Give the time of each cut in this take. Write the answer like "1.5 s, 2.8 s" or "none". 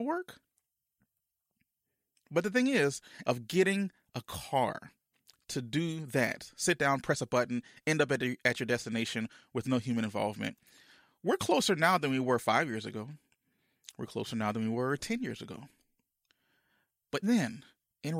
3.2 s, 17.2 s